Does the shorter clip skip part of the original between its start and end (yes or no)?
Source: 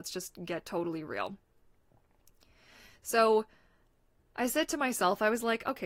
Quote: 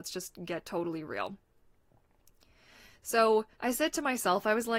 yes